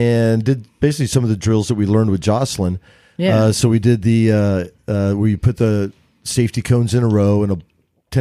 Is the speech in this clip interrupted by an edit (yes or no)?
no